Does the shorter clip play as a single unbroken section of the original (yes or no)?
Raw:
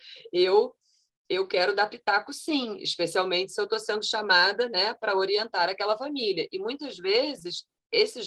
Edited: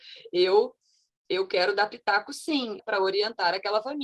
no